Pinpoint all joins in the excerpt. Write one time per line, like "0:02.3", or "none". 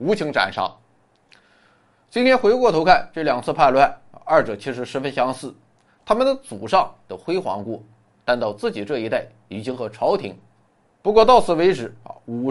0:10.8